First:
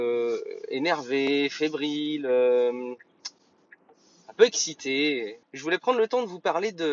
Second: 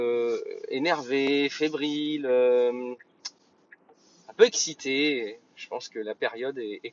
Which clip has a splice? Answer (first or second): first